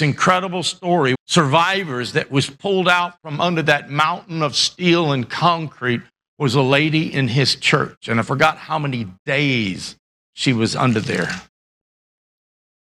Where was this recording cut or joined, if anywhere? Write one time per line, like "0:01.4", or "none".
0:01.1